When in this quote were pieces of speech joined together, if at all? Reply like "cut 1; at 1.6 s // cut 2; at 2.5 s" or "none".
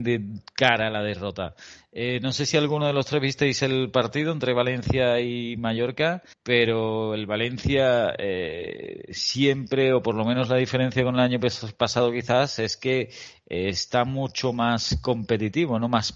cut 1; at 6.3 s